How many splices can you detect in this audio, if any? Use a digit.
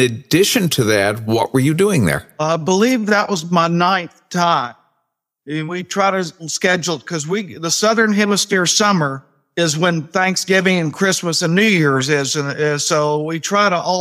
0